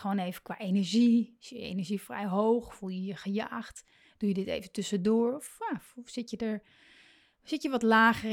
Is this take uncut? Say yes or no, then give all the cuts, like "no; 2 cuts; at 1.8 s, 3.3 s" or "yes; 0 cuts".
yes; 0 cuts